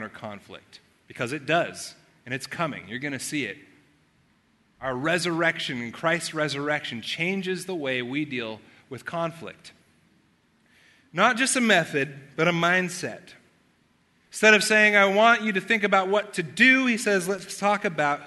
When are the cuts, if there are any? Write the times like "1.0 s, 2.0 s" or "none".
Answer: none

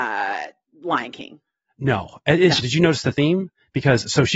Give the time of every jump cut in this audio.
2.6 s

